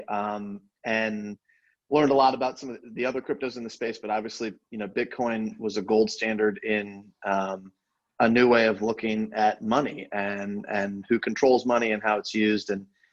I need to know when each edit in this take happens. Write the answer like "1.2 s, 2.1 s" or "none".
none